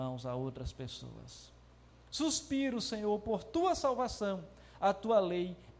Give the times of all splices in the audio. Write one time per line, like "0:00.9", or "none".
0:01.9